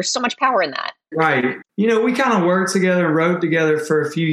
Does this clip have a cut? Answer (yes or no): no